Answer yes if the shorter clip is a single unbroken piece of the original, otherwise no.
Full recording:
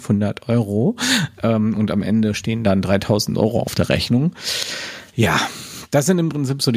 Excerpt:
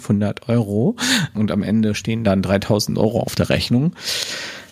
no